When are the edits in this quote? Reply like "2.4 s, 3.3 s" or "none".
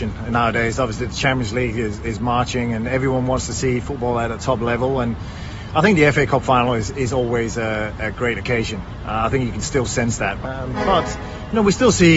10.4 s